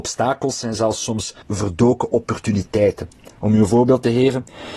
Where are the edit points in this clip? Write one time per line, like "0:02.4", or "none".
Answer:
0:01.4